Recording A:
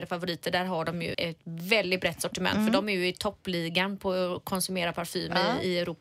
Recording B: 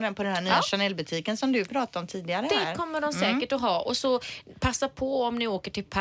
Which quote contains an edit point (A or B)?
A